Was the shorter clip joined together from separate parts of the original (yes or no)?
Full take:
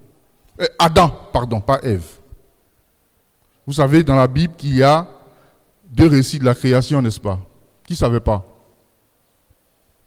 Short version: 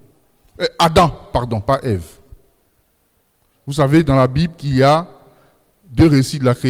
no